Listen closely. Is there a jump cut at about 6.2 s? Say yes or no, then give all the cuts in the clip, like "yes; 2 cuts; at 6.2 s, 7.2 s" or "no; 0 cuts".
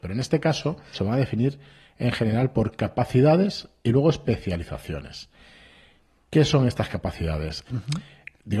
no; 2 cuts; at 0.9 s, 7.7 s